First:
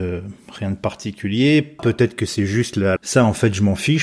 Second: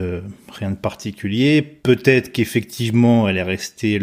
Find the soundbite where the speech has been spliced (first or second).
first